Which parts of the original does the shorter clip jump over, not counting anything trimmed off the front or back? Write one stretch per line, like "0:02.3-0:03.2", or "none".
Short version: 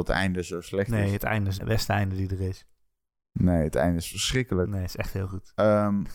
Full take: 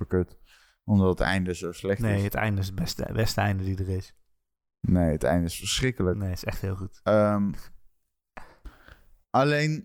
0:02.7-0:03.1